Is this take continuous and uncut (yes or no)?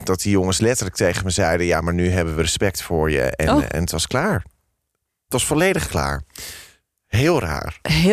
yes